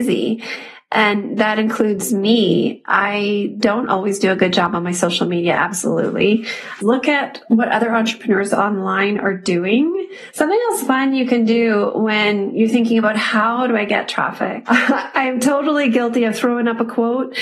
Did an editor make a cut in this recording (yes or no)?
yes